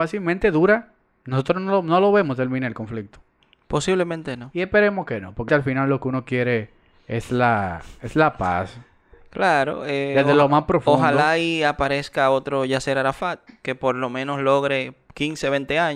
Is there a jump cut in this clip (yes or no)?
yes